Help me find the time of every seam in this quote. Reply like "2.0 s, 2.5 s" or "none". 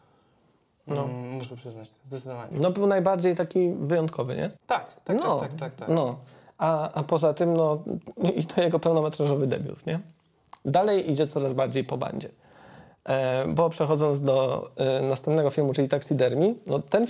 4.6 s